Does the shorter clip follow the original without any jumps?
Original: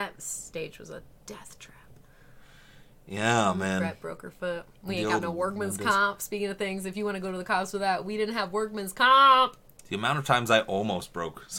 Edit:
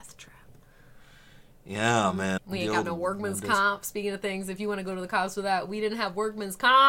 no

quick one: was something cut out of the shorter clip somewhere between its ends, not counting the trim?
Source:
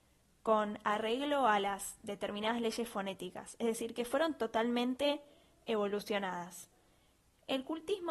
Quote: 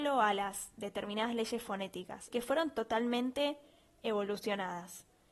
yes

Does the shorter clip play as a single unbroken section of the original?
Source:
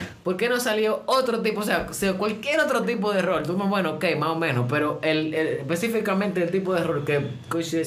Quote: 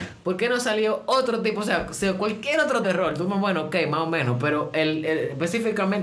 no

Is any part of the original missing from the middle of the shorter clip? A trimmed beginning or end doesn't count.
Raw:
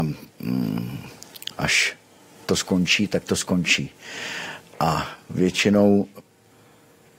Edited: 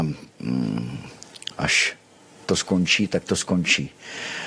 no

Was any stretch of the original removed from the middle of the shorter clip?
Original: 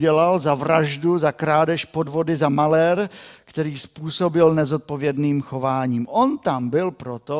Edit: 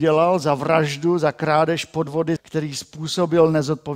yes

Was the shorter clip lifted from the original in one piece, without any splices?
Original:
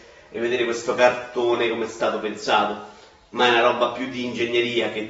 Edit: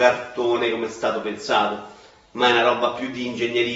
yes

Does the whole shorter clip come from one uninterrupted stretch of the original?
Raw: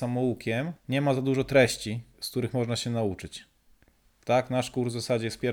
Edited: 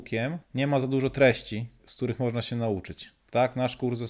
no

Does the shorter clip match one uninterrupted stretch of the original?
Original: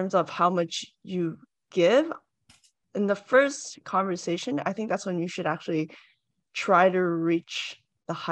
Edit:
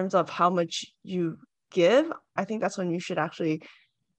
no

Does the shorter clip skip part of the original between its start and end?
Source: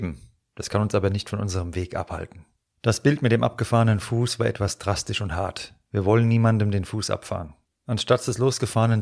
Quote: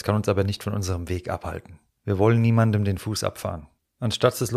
yes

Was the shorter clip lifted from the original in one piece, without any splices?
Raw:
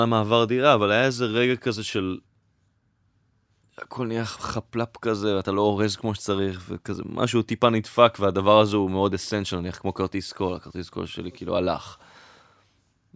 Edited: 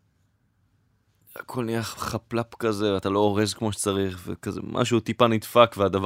yes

